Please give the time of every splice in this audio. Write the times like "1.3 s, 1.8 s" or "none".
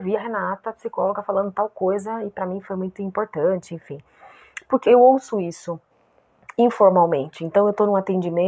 4.8 s